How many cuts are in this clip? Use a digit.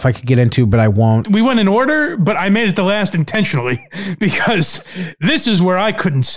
1